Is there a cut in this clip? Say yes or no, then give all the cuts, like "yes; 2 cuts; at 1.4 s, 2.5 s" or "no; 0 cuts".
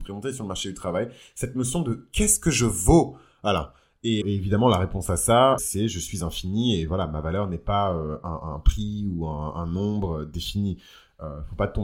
yes; 2 cuts; at 4.2 s, 5.6 s